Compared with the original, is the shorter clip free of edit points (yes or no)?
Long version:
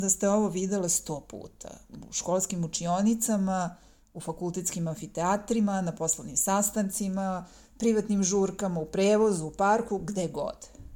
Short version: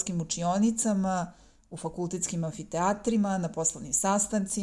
yes